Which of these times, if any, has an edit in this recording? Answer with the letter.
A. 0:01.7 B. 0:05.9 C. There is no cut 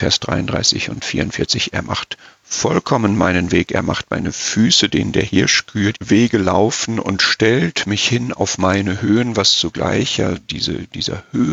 B